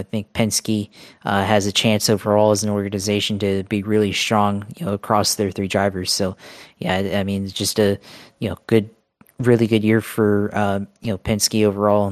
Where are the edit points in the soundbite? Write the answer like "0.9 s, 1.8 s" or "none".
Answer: none